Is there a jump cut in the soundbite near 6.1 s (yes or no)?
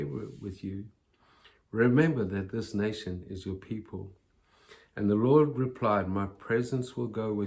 no